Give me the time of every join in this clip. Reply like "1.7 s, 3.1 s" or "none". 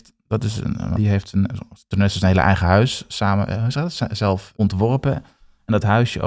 1.0 s, 4.5 s